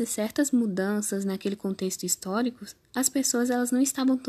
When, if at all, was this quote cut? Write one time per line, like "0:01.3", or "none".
none